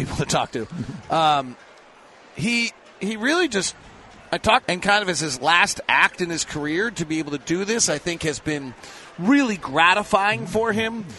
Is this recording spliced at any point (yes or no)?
yes